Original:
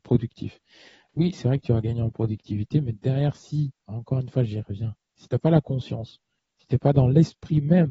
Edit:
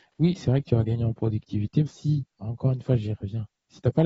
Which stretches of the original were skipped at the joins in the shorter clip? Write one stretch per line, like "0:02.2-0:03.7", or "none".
0:02.8-0:03.3